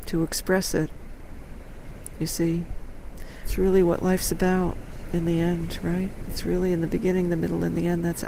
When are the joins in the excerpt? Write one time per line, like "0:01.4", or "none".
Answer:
0:03.4